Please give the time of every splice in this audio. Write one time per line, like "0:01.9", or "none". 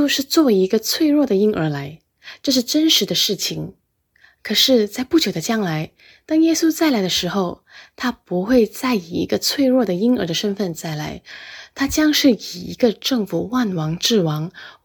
none